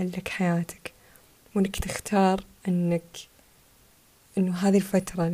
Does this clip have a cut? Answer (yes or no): no